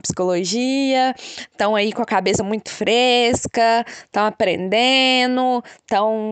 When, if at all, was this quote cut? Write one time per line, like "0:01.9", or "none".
none